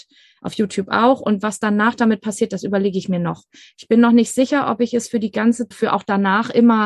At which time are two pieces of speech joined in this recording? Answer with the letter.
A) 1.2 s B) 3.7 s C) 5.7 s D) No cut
C